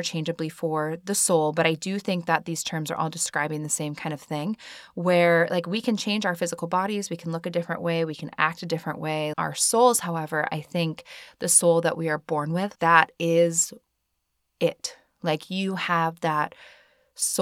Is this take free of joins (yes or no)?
no